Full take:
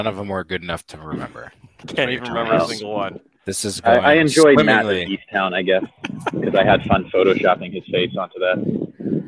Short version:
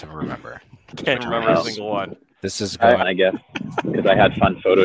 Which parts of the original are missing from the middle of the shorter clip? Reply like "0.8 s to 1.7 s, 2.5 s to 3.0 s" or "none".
2.1 s to 2.2 s, 4.1 s to 5.5 s